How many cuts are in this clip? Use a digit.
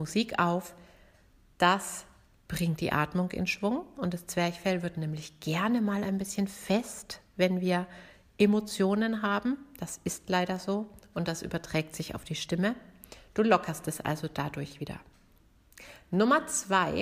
0